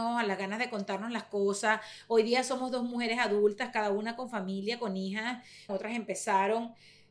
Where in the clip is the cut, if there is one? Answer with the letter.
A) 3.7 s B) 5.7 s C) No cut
B